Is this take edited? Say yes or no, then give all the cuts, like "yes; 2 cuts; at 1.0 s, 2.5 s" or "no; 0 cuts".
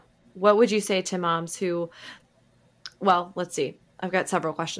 no; 0 cuts